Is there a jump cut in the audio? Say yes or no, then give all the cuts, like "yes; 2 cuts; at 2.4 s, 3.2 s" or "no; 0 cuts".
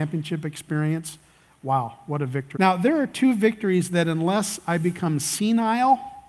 yes; 1 cut; at 2.6 s